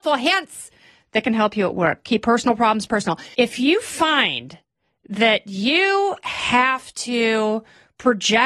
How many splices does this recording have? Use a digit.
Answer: 1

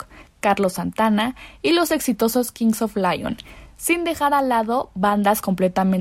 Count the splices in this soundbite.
0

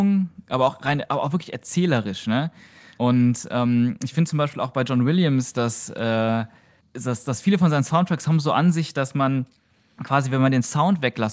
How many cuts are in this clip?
0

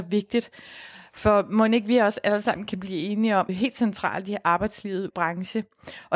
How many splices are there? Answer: 2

